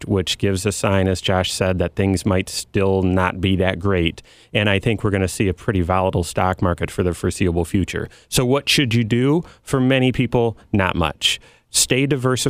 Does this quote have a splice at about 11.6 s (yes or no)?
no